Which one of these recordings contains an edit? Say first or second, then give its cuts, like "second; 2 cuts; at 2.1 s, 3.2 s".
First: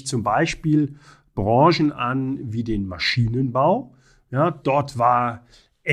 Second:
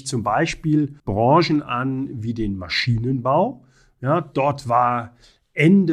second; 1 cut; at 1.0 s